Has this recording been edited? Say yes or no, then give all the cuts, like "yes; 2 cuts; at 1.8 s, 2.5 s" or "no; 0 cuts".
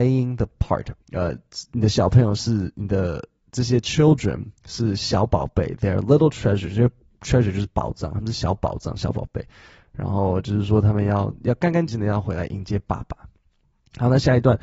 yes; 2 cuts; at 1.0 s, 11.9 s